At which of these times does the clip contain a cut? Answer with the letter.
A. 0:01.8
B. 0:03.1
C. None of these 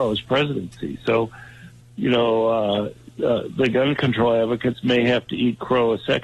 A